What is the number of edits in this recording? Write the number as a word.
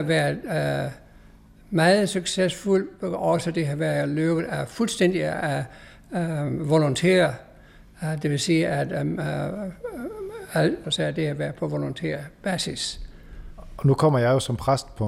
one